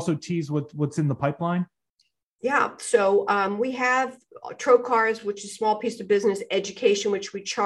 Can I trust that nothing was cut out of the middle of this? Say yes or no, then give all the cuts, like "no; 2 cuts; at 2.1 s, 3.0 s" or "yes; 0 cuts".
yes; 0 cuts